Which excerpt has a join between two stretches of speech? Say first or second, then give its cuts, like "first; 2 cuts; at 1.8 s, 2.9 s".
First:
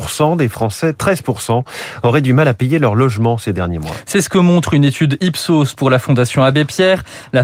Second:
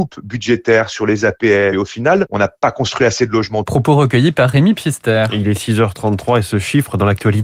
second; 2 cuts; at 1.7 s, 3.7 s